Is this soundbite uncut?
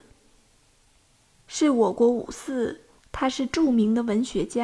no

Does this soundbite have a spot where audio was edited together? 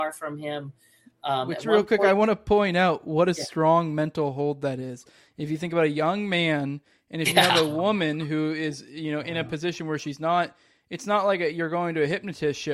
no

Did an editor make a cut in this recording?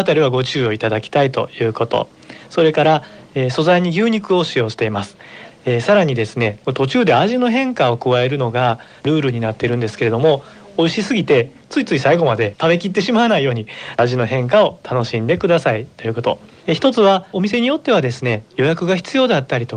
yes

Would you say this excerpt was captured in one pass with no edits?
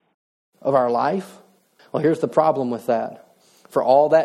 no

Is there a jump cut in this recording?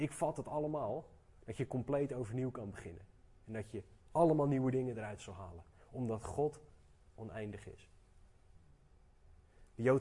yes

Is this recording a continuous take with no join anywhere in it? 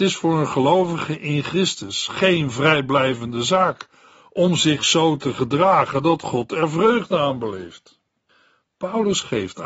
yes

